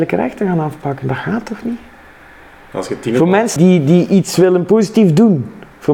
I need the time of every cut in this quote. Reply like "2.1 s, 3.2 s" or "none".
3.6 s